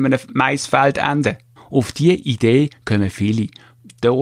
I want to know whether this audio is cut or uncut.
cut